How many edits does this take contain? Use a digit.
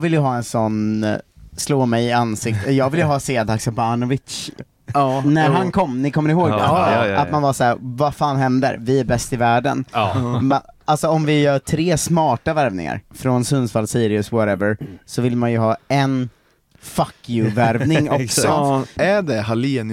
2